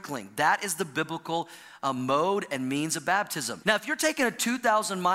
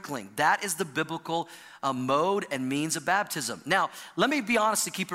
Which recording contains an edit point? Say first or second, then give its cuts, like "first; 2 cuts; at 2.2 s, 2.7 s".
first; 1 cut; at 3.6 s